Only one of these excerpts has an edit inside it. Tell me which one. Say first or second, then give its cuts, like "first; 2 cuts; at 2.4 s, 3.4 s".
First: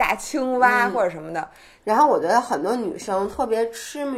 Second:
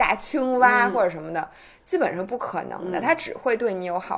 first; 1 cut; at 1.8 s